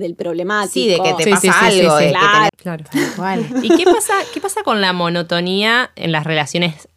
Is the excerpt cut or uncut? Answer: cut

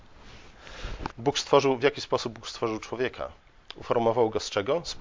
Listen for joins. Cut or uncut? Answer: cut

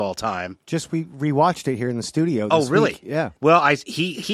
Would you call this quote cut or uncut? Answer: cut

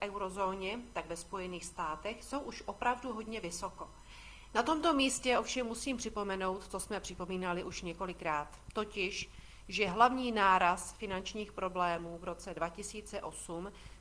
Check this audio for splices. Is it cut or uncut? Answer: cut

